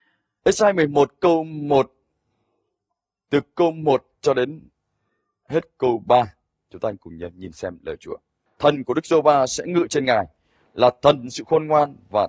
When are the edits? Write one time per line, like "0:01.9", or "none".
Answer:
0:08.5